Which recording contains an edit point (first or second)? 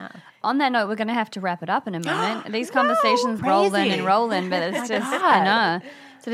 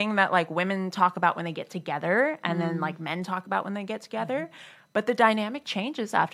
first